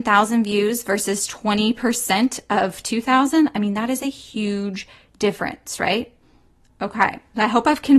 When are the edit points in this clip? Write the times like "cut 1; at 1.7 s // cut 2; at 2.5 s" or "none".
cut 1; at 1.3 s